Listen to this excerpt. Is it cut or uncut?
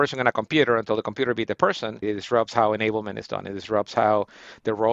cut